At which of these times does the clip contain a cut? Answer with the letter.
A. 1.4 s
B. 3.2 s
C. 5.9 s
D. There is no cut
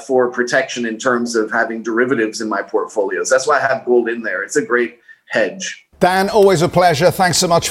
C